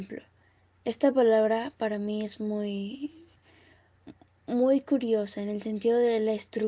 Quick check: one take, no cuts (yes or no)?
yes